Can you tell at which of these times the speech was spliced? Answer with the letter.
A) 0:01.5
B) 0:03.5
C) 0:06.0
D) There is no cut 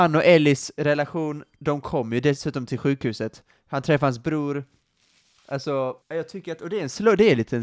C